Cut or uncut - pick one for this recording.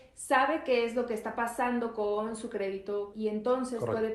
cut